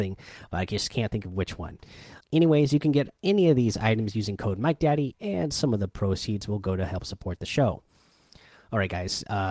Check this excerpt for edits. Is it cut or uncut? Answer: cut